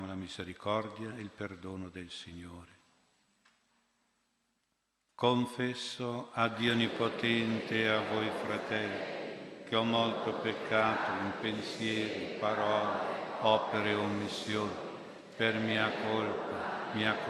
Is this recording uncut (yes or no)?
yes